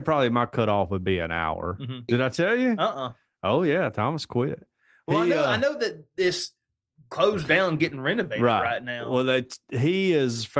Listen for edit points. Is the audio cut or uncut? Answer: cut